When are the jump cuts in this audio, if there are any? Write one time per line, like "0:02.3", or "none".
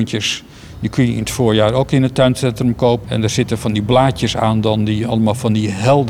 0:03.0